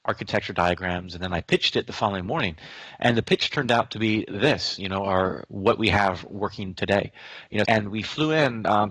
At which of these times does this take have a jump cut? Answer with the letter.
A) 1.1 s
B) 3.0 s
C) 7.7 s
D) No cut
C